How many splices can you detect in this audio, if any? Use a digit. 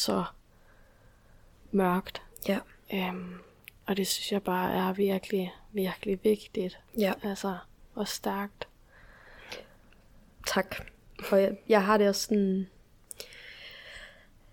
0